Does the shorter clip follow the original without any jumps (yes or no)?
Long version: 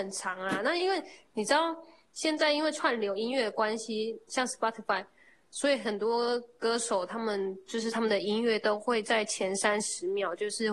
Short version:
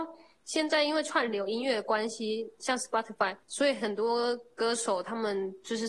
no